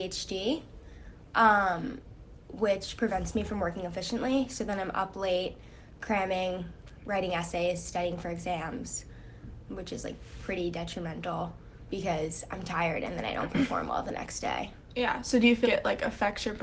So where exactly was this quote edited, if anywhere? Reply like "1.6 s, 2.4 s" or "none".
9.7 s, 11.9 s, 15.6 s